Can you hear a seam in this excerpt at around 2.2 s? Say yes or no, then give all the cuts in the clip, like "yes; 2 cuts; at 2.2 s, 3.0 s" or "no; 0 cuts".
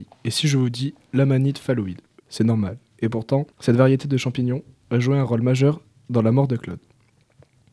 yes; 2 cuts; at 2.2 s, 3.5 s